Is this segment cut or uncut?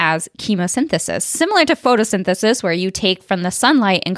uncut